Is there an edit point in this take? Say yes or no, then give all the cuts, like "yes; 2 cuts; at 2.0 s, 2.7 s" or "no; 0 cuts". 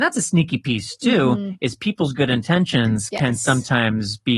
no; 0 cuts